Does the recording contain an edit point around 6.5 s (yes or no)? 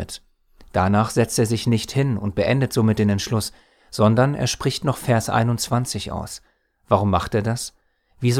no